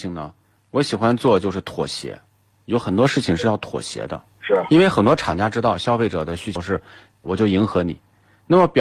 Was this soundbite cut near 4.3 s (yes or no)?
yes